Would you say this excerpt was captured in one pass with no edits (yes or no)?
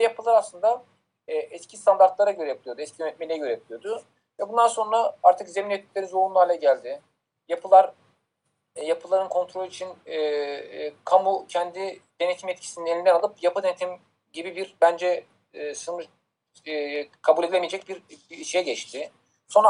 yes